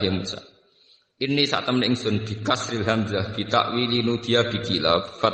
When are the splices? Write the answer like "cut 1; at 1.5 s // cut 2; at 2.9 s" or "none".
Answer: none